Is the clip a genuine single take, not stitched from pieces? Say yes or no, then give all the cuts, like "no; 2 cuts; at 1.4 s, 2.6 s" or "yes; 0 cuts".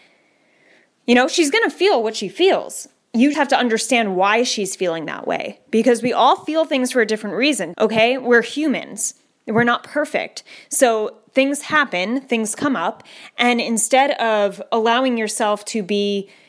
no; 2 cuts; at 3.3 s, 7.7 s